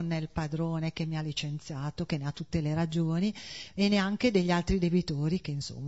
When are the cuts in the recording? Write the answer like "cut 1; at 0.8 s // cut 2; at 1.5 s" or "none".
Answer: none